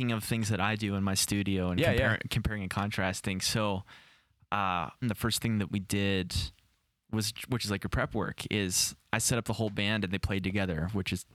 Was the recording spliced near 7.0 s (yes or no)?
no